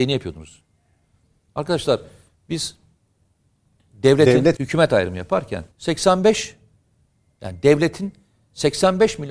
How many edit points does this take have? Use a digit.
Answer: 2